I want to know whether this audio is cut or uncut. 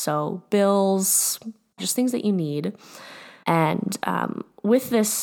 cut